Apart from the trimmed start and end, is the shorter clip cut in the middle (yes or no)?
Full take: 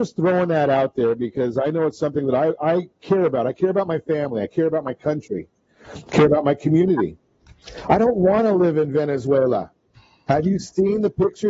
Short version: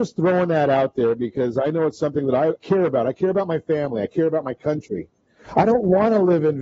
yes